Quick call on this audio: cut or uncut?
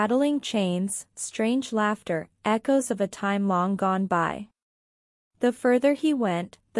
cut